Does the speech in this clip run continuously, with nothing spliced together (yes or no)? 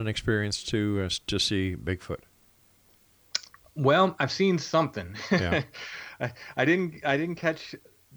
yes